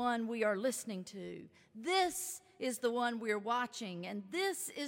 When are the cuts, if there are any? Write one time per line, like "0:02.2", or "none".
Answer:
none